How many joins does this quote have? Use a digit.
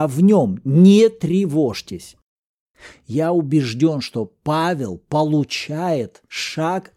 1